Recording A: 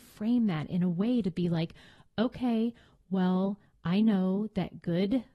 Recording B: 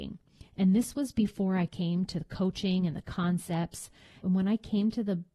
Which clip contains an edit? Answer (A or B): B